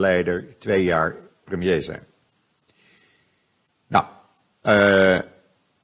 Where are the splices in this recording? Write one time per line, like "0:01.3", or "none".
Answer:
0:01.4